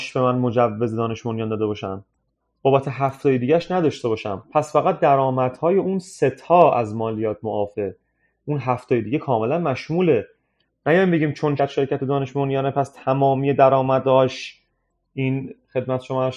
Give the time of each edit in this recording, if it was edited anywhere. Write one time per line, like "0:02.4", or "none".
0:11.6